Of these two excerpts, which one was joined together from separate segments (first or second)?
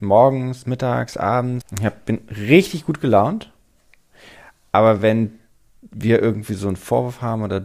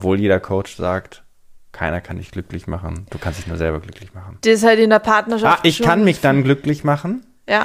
first